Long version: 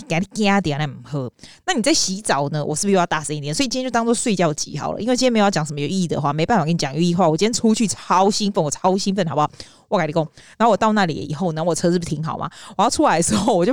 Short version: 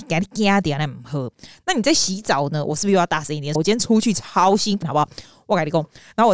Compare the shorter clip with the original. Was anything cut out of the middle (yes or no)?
yes